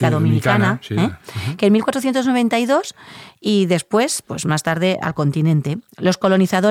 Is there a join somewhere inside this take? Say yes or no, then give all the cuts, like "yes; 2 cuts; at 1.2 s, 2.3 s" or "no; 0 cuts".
no; 0 cuts